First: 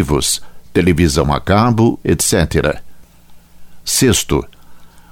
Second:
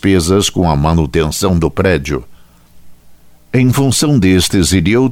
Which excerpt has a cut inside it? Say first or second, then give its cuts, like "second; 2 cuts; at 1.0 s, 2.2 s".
first; 1 cut; at 2.0 s